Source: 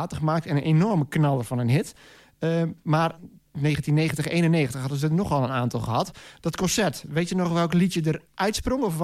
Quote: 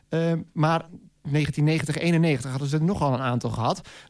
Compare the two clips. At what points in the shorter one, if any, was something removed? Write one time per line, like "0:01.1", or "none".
none